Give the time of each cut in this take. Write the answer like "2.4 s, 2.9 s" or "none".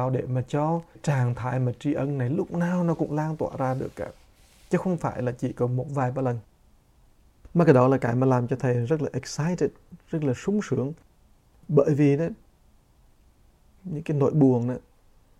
13.8 s

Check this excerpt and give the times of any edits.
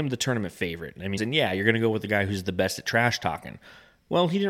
1.2 s

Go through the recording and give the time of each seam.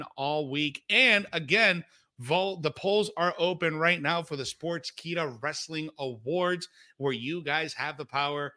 none

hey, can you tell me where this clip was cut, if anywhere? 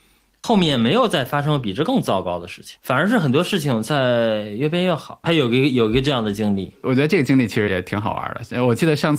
5.2 s, 7.7 s

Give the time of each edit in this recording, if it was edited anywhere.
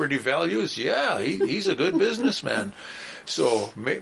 none

